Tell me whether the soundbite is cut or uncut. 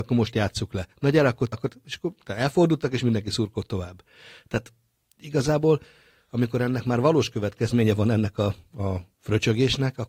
cut